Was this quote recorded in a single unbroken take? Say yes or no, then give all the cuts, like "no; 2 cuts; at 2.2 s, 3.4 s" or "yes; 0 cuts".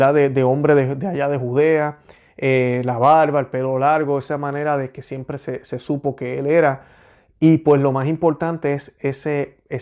yes; 0 cuts